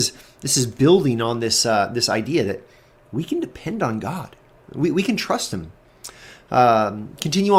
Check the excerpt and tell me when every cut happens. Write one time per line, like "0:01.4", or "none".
none